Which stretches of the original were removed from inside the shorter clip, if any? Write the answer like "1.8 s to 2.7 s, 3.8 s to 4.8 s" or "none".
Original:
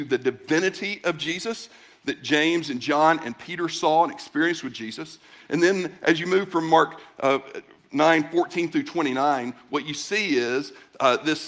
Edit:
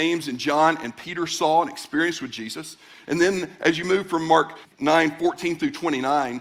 7.1 s to 7.8 s